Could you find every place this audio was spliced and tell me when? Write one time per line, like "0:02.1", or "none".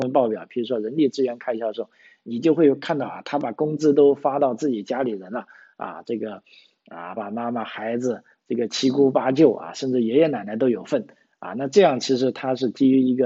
0:07.2